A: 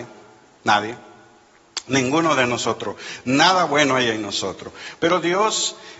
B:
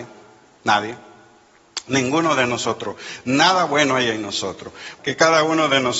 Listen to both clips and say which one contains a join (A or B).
B